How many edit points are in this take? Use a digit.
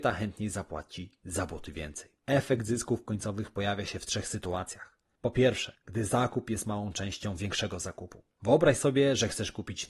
0